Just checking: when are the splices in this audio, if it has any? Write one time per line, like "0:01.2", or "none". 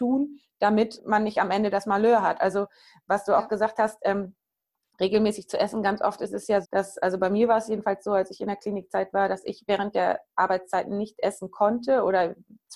0:01.0
0:06.6